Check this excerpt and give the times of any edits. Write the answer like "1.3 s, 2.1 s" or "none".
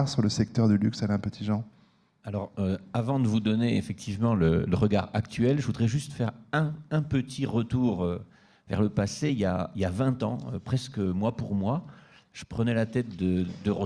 none